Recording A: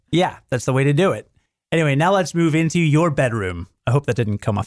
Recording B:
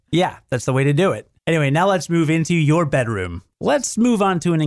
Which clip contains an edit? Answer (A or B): B